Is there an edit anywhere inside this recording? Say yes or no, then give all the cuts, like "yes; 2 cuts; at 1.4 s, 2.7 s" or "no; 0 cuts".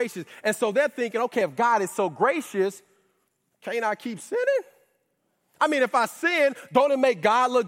no; 0 cuts